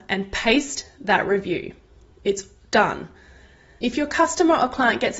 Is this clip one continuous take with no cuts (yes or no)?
no